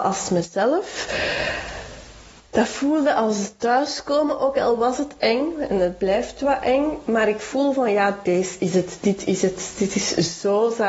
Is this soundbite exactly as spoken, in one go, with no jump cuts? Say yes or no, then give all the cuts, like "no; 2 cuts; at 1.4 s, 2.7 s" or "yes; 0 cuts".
yes; 0 cuts